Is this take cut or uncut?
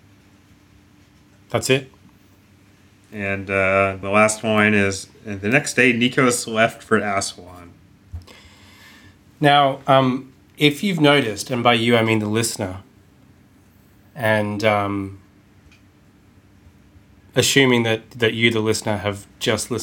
cut